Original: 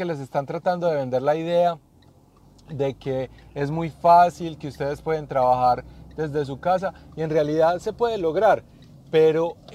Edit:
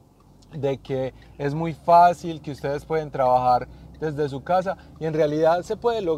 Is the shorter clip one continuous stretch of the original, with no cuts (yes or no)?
yes